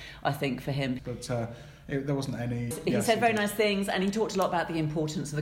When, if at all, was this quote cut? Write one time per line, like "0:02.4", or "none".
0:01.0
0:02.7